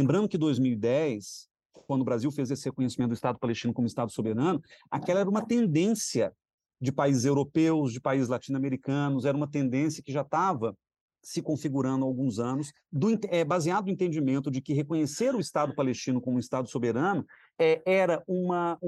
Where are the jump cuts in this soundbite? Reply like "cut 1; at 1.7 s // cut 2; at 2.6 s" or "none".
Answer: none